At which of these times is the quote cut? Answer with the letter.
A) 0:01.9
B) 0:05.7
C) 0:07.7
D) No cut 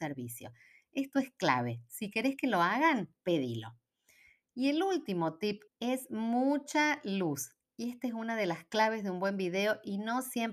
B